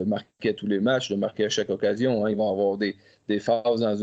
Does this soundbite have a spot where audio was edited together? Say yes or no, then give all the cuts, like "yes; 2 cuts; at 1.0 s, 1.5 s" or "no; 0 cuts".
no; 0 cuts